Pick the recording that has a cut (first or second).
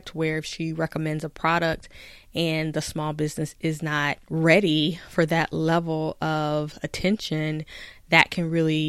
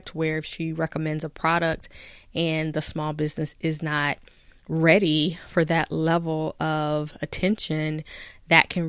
first